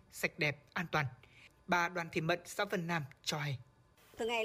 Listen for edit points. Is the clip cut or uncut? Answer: uncut